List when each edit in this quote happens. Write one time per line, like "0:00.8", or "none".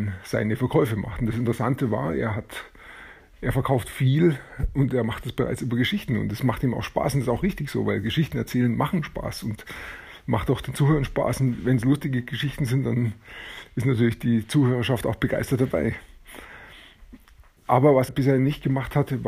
0:18.1